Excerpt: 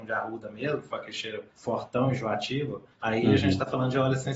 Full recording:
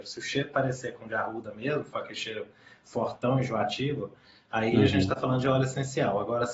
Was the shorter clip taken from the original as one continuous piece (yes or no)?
no